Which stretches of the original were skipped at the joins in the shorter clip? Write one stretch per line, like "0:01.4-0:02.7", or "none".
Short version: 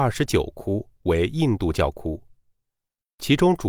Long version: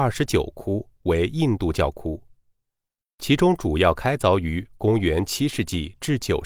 none